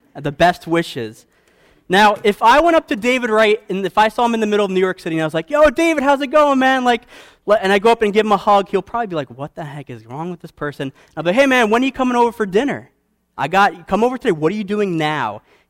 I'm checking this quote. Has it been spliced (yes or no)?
no